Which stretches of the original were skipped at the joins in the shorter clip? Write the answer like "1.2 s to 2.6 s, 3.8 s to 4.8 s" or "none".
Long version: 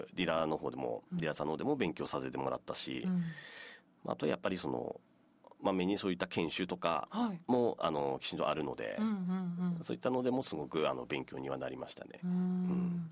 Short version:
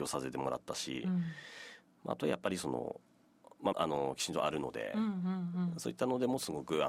5.7 s to 7.8 s